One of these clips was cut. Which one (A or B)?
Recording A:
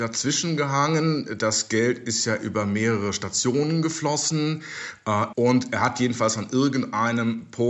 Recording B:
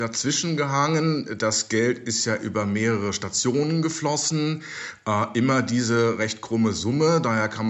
A